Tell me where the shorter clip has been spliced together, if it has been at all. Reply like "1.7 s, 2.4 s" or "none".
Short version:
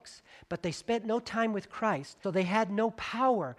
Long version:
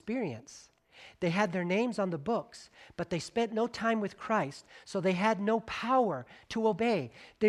2.2 s